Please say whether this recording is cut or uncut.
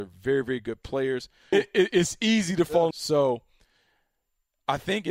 cut